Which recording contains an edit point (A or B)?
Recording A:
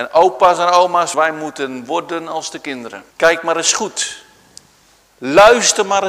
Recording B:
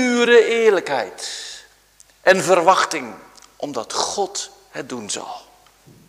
A